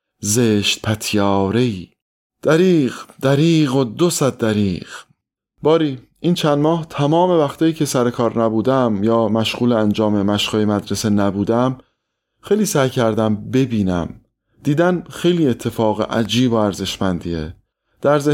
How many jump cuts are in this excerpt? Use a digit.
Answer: 0